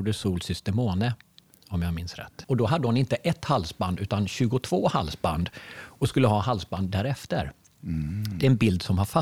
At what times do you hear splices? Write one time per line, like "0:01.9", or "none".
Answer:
0:02.4